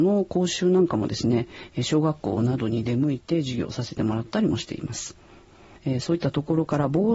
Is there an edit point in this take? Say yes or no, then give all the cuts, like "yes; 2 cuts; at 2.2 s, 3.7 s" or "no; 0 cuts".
yes; 1 cut; at 5.8 s